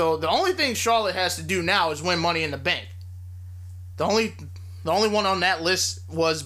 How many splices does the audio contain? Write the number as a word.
zero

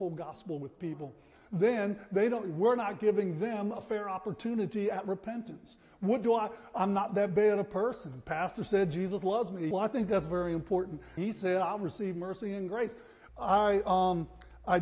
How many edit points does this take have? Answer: three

